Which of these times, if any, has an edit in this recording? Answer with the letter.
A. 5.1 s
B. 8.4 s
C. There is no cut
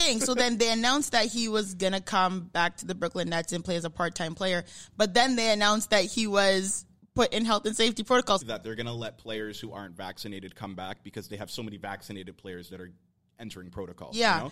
B